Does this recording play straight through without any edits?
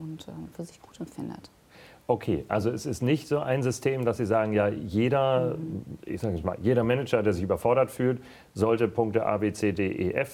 yes; 0 cuts

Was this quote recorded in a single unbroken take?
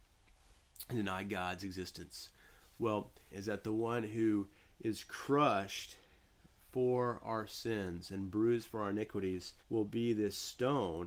no; 2 cuts; at 3.3 s, 9.6 s

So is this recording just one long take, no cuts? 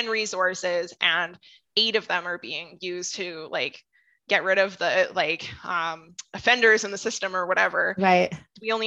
yes; 0 cuts

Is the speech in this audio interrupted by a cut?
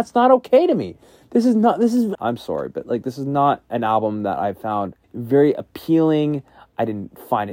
yes; 2 cuts; at 2.1 s, 5.0 s

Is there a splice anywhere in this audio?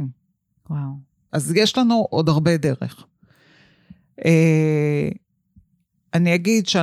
yes; 1 cut; at 1.3 s

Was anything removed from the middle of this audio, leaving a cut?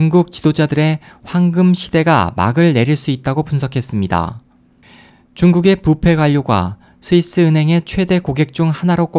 no; 0 cuts

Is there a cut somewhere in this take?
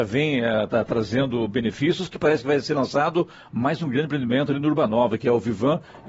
no; 0 cuts

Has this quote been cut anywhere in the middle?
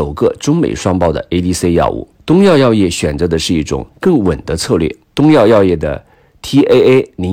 yes; 2 cuts; at 2.1 s, 5.0 s

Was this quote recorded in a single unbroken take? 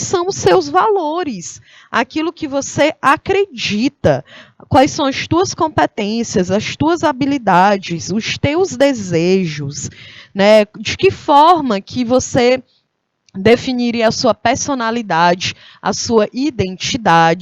yes; 0 cuts

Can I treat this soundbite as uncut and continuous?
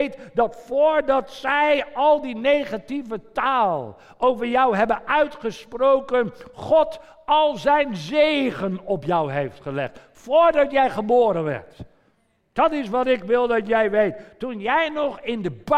yes; 0 cuts

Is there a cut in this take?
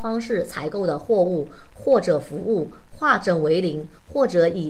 no; 0 cuts

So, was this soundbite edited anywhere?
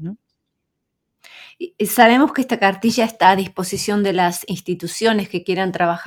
no; 0 cuts

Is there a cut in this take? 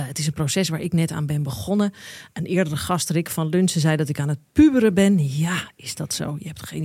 no; 0 cuts

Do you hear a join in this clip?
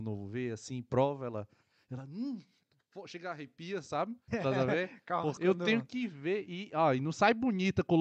yes; 2 cuts; at 4.3 s, 5.4 s

